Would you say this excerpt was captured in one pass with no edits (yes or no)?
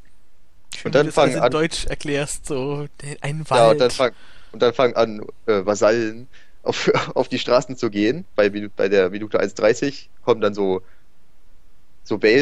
yes